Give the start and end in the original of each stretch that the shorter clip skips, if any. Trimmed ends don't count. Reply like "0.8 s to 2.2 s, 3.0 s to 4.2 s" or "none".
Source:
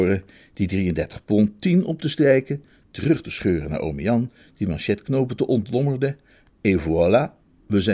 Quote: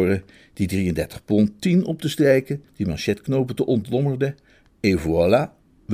2.7 s to 4.5 s